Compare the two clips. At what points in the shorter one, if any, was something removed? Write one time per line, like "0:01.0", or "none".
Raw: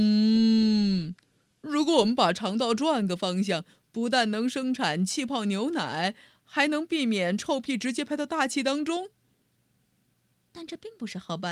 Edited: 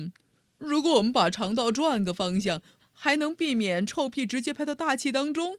0:02.8